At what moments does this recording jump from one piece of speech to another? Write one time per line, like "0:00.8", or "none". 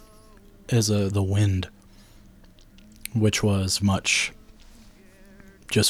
0:01.1
0:03.8

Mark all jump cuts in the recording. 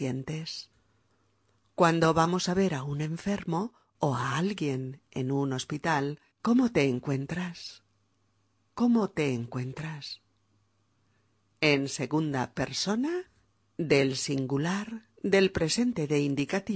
0:06.3

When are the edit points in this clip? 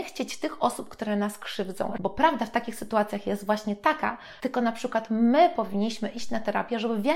0:02.0
0:04.4

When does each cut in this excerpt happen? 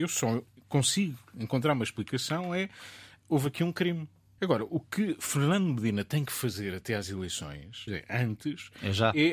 0:04.4
0:07.9

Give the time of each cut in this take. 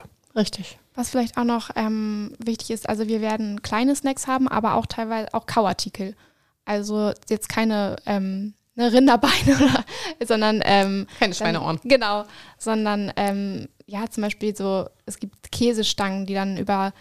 none

